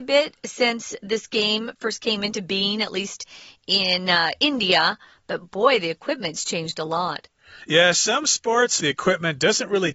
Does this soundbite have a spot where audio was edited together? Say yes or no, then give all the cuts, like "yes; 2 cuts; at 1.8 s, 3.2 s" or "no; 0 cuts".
yes; 1 cut; at 8.8 s